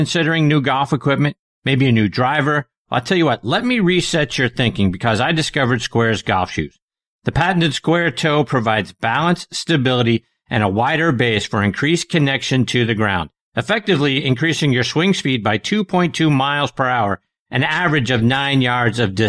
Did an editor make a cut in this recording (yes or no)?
no